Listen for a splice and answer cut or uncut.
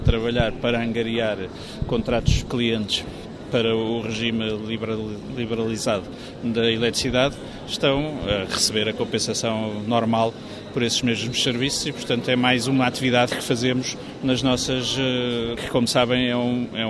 cut